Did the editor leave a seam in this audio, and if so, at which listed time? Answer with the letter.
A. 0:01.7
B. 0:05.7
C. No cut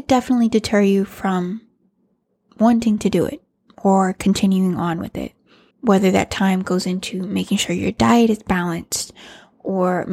B